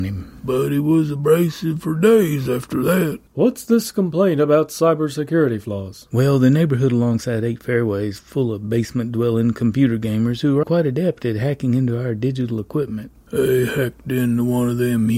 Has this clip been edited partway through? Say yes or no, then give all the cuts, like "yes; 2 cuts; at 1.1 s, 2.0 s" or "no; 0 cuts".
yes; 1 cut; at 10.6 s